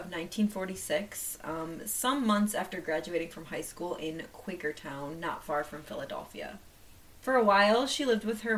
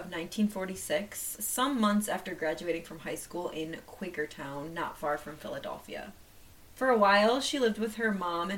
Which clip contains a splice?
second; 1 cut; at 1.4 s

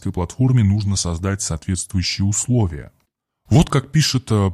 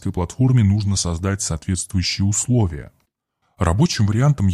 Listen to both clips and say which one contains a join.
second; 1 cut; at 3.4 s

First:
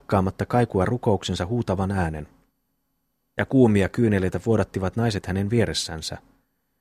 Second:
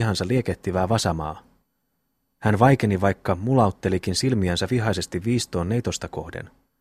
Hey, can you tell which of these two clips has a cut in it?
second; 1 cut; at 2.3 s

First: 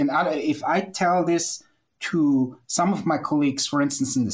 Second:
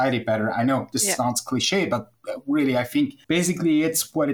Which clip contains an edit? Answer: second; 1 cut; at 3.2 s

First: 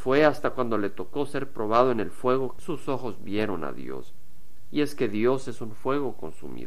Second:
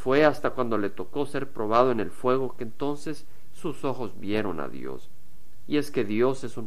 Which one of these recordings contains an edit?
first; 1 cut; at 2.6 s

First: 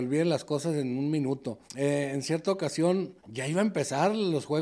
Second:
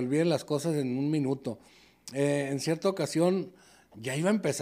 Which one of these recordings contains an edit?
first; 2 cuts; at 1.7 s, 3.2 s

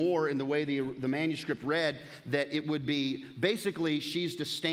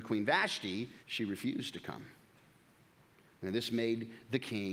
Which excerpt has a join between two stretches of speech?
second; 1 cut; at 1.0 s

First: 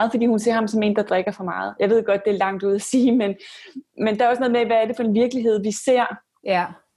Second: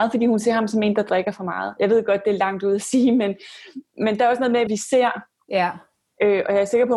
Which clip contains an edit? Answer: second; 1 cut; at 4.7 s

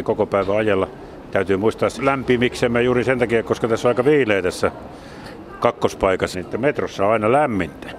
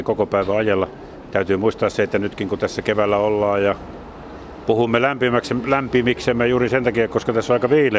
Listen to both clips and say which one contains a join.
first; 2 cuts; at 2.0 s, 6.3 s

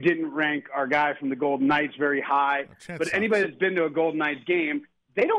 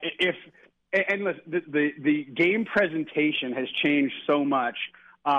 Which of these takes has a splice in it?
second; 1 cut; at 1.6 s

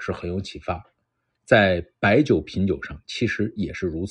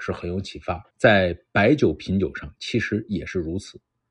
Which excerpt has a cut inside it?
second; 1 cut; at 0.9 s

